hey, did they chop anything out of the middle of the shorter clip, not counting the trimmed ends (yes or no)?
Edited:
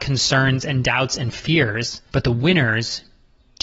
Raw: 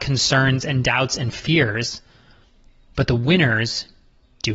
yes